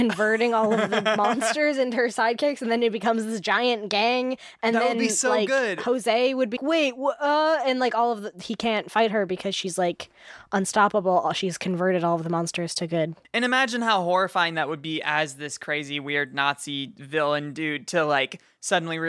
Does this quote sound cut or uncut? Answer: cut